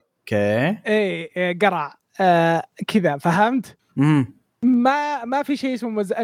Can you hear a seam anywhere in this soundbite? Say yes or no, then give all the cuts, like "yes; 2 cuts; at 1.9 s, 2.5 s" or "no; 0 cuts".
no; 0 cuts